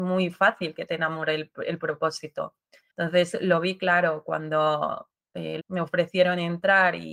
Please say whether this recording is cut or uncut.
cut